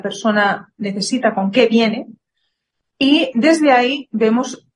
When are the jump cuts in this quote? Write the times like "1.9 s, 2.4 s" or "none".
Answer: 3.3 s